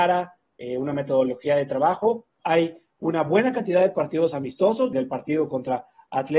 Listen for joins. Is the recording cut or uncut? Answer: cut